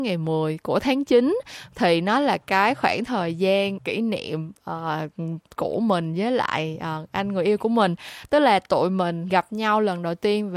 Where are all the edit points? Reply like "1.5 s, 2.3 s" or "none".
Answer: 3.8 s